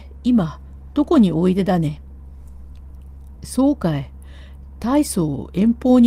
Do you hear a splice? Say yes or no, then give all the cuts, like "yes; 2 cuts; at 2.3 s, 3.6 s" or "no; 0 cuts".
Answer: yes; 1 cut; at 3.4 s